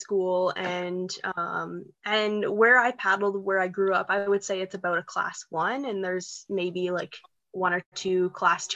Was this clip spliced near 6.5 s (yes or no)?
no